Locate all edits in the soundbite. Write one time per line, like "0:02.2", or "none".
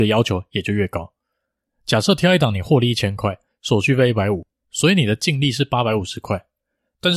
0:01.7